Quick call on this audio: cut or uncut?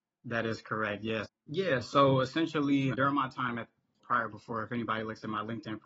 cut